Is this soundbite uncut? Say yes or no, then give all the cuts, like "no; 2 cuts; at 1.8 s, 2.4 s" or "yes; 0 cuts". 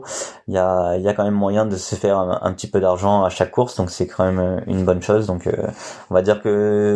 yes; 0 cuts